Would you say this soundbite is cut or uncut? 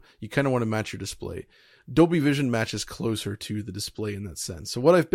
uncut